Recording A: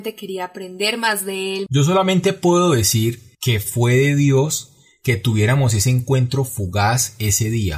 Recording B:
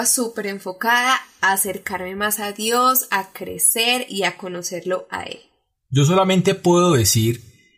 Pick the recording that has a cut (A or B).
A